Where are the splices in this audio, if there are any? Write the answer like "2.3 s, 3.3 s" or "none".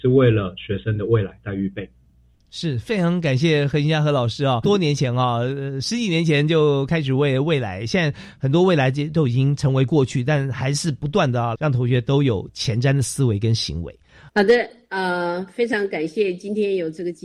11.5 s, 14.3 s